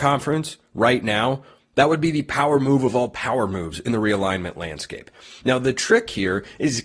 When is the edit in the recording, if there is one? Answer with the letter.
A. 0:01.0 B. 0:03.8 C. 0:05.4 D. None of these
D